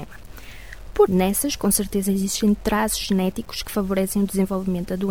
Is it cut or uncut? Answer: cut